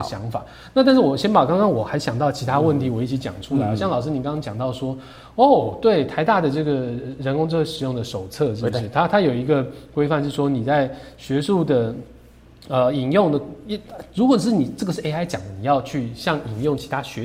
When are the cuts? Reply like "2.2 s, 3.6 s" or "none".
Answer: none